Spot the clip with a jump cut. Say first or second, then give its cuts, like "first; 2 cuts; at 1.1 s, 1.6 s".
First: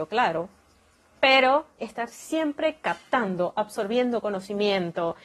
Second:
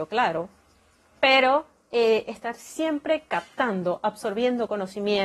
first; 1 cut; at 1.8 s